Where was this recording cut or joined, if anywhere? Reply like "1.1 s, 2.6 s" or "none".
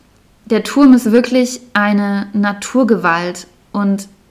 none